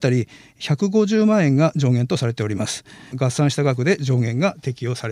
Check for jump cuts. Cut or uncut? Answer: cut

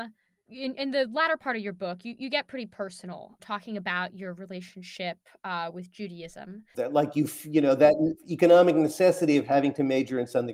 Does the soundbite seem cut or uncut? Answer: cut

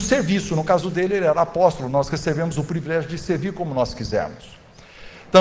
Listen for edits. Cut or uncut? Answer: uncut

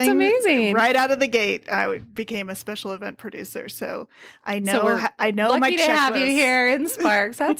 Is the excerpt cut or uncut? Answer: uncut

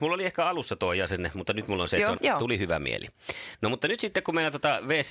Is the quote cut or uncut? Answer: cut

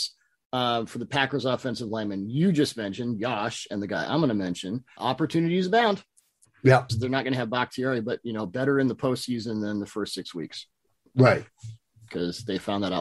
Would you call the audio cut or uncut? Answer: cut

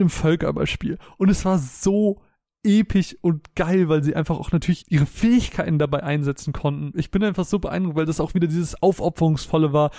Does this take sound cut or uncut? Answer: cut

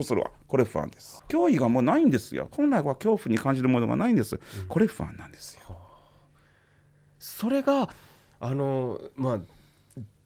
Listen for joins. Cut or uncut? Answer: cut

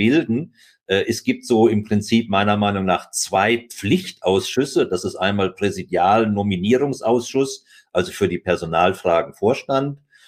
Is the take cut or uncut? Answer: uncut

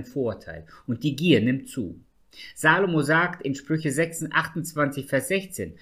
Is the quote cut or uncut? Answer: uncut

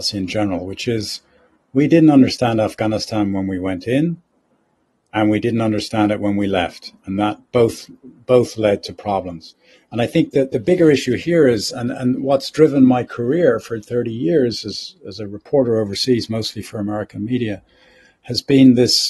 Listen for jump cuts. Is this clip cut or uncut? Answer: uncut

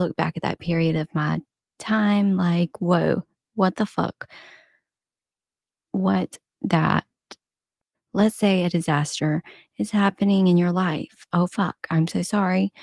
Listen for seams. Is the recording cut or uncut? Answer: cut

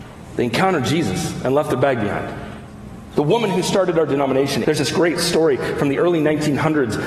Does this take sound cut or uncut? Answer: cut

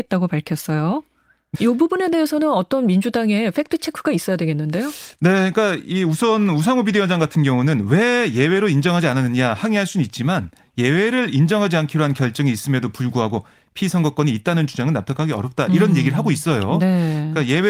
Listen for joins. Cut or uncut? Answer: cut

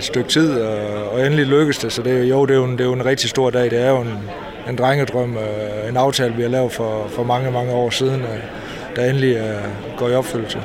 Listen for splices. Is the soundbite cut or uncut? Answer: uncut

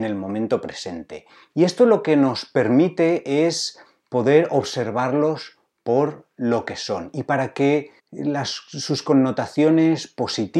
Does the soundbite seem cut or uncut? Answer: cut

